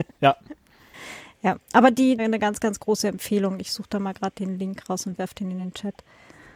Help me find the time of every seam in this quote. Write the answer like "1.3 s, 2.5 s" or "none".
2.2 s